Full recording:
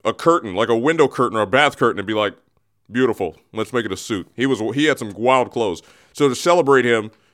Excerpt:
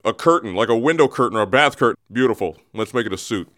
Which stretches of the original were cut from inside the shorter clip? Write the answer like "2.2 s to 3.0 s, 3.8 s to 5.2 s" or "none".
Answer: 1.9 s to 2.7 s